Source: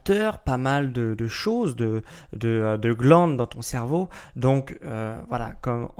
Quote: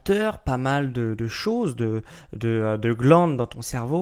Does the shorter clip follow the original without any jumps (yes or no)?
yes